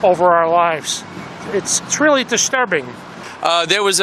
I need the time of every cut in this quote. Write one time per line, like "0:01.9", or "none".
0:01.8